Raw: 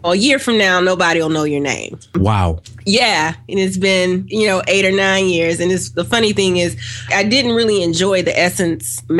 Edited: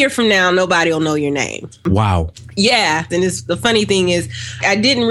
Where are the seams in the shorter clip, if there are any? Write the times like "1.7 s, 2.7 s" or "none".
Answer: 3.1 s